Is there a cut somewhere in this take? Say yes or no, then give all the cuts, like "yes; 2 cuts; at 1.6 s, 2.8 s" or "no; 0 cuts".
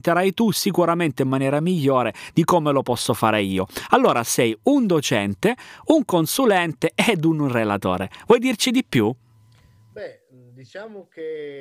no; 0 cuts